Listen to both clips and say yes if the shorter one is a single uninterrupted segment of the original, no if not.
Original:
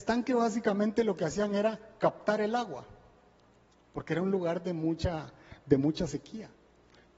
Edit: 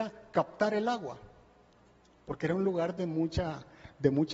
yes